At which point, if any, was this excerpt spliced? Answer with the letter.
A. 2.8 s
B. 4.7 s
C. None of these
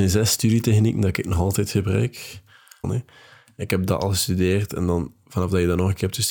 A